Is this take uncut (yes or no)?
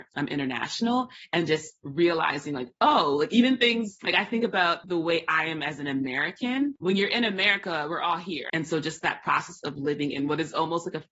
no